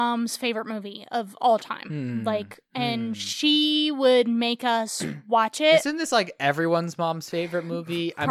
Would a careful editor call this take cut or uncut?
uncut